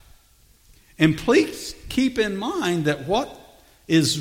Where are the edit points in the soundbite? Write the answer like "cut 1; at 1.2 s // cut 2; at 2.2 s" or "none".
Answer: none